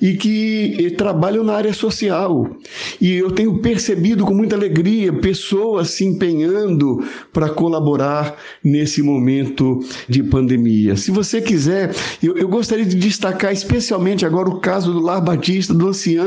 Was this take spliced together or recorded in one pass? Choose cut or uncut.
cut